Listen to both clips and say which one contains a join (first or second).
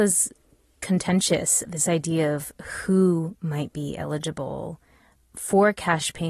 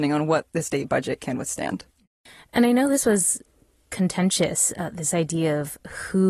first